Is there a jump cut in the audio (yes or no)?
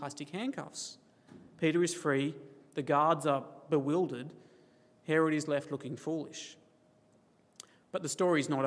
no